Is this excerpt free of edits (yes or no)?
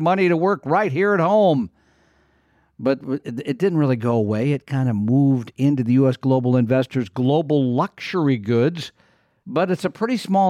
no